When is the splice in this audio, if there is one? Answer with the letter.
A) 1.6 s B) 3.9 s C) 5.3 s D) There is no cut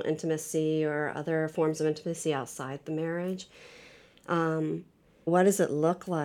C